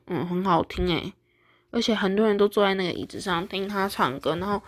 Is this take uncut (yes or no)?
yes